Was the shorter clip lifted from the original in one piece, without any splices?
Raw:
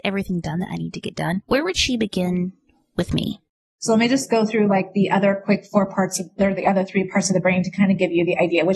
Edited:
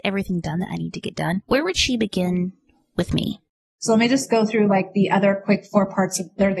yes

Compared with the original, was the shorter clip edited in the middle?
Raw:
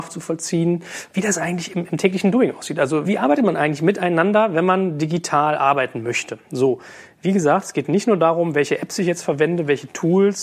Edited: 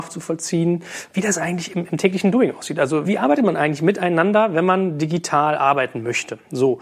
no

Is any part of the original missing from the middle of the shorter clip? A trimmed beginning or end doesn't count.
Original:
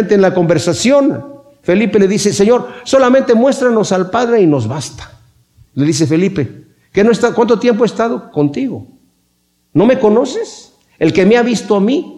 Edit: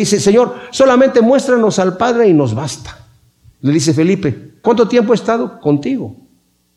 yes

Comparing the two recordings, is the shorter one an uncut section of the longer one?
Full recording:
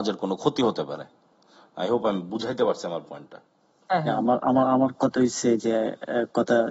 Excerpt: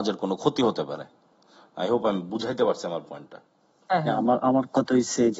no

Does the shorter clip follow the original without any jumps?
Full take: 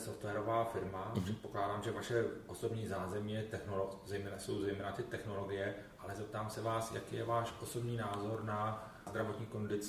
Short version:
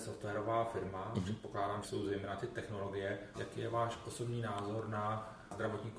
no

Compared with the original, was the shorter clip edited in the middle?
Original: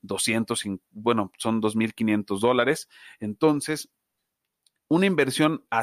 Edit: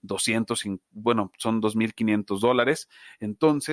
no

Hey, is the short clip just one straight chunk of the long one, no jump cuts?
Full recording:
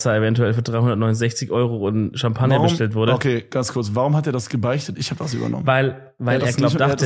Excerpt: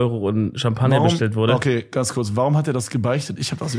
yes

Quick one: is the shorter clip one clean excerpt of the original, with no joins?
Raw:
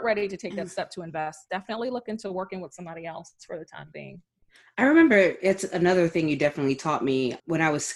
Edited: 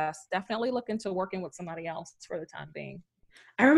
yes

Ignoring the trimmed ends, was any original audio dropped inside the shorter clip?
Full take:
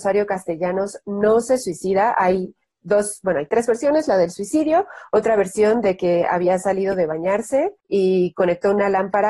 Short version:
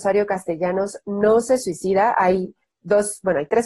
no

